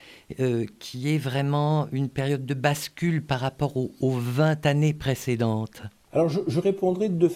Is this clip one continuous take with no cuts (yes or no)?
yes